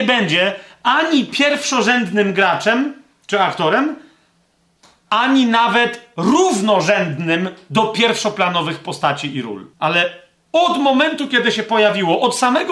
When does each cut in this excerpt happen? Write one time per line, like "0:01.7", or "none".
0:09.7